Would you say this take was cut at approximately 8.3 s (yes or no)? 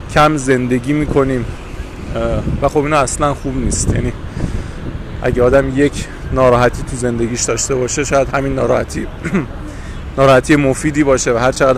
yes